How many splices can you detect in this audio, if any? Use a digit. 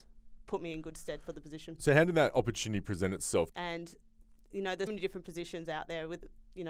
2